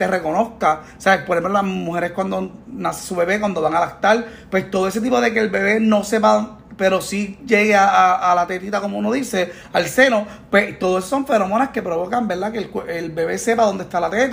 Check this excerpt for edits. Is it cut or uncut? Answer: uncut